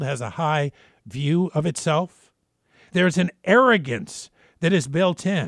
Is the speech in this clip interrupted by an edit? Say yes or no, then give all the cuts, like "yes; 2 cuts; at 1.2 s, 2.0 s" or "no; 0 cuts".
no; 0 cuts